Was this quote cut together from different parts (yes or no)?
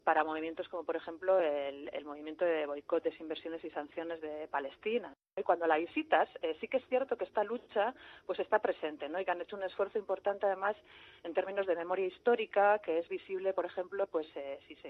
no